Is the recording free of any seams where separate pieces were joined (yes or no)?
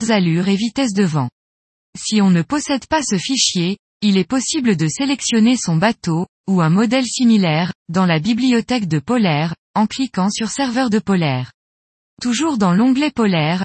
yes